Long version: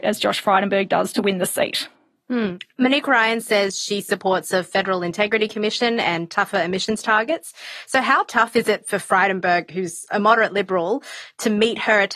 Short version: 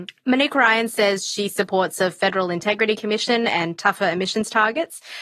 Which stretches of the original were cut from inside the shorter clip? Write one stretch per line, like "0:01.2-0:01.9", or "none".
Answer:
none